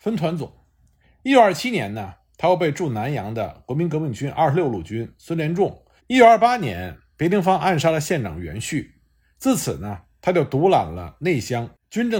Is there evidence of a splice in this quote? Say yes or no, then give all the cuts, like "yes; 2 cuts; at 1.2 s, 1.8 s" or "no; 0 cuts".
yes; 1 cut; at 6.0 s